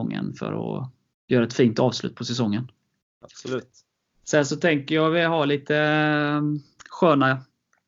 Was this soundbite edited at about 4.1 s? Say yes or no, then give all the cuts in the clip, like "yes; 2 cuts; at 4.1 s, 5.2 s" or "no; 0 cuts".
no; 0 cuts